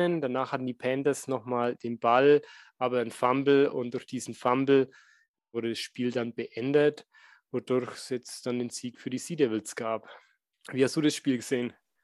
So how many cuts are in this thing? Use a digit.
1